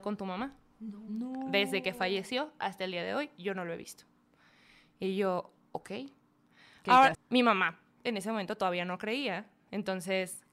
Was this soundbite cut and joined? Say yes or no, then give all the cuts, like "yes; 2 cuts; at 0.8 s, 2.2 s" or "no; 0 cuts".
yes; 1 cut; at 7.1 s